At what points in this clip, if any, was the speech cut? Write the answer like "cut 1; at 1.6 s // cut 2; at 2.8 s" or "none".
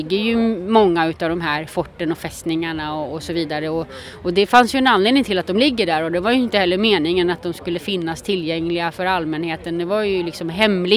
none